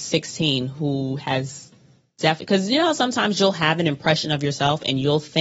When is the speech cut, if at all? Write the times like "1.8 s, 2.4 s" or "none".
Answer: none